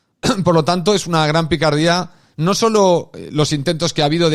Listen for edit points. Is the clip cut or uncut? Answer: uncut